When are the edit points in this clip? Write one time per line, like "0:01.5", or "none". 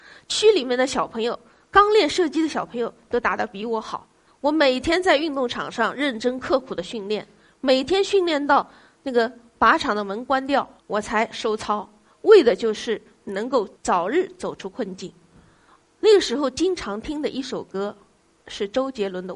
0:04.3
0:10.8

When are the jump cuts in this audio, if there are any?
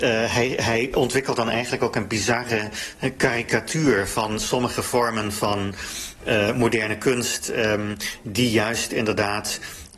none

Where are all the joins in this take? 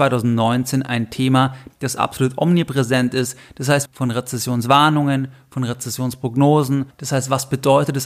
0:01.7
0:03.9
0:06.9

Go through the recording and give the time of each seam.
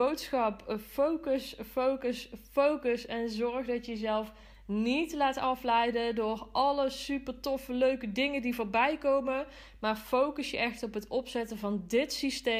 none

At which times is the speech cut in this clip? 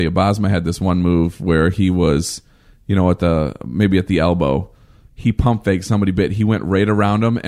none

